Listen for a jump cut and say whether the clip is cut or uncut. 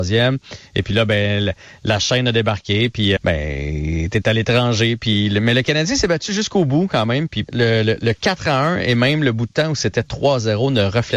cut